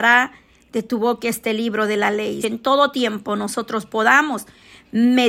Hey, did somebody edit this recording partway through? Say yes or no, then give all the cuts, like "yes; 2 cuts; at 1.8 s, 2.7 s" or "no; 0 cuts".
yes; 1 cut; at 2.4 s